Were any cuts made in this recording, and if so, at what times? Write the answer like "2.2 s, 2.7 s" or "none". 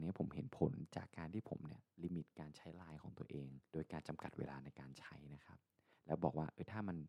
3.7 s